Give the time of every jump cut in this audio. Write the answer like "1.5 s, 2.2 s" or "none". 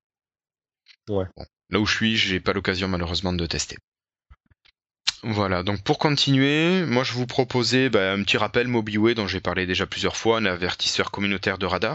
none